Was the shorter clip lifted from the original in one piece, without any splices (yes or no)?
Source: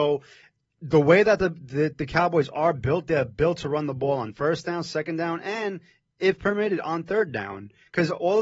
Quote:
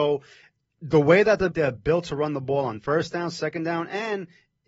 no